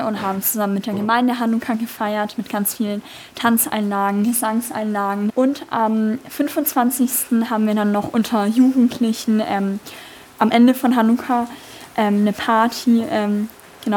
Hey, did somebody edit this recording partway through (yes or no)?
no